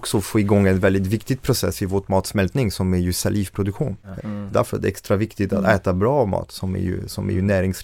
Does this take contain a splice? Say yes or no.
yes